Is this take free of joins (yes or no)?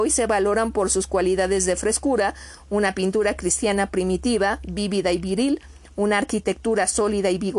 yes